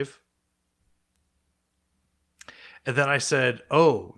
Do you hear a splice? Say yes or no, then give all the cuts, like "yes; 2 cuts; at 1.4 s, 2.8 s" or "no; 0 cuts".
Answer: no; 0 cuts